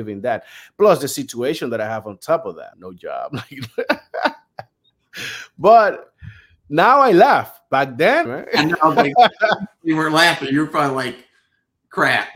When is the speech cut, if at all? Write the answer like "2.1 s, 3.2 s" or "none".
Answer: 2.7 s, 8.3 s